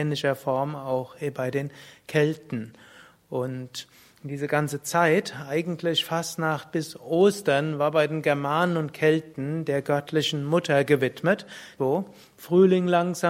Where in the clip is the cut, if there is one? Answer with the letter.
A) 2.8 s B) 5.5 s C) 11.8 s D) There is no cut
C